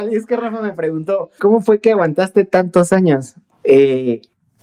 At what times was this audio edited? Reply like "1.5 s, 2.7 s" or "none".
1.4 s